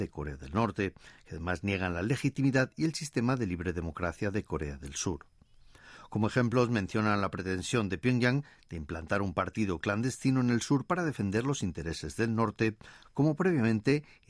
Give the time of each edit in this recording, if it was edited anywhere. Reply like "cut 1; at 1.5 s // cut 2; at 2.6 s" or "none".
none

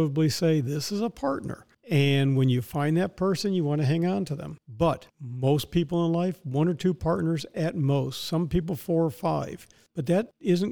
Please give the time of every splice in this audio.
none

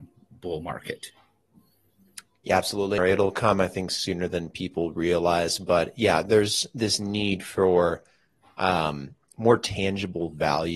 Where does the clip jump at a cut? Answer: cut 1; at 3.0 s

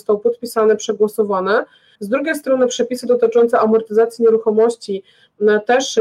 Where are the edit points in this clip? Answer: cut 1; at 1.9 s

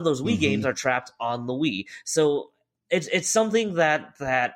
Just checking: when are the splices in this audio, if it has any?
none

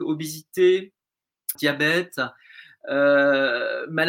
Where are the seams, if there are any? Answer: cut 1; at 1.5 s

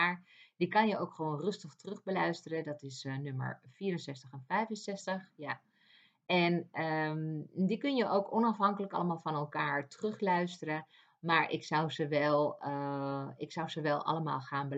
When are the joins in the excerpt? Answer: none

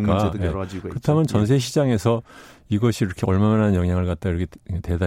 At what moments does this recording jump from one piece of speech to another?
none

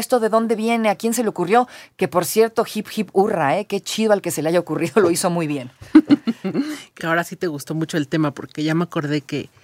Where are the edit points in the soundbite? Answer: cut 1; at 7.0 s

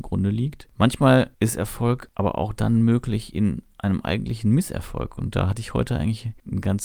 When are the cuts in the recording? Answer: none

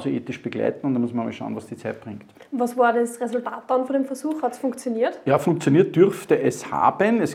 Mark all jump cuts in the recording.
none

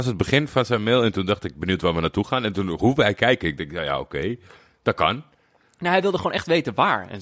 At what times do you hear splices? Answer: none

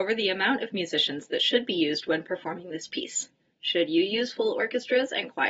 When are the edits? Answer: none

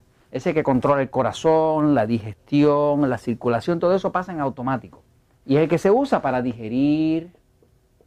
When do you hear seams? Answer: cut 1; at 5.4 s

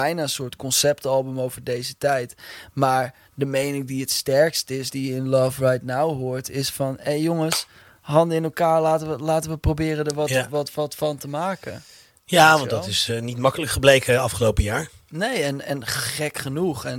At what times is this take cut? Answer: none

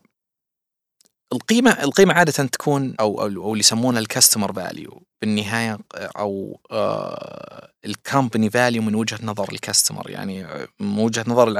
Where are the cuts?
cut 1; at 2.9 s

